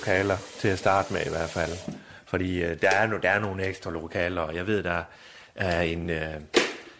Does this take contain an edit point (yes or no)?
no